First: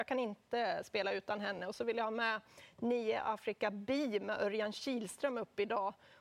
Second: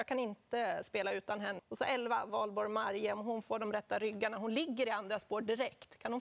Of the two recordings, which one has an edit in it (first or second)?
second